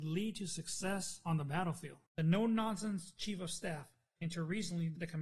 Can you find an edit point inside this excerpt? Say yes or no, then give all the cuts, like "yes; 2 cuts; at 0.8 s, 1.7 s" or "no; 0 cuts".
yes; 2 cuts; at 2.1 s, 4.2 s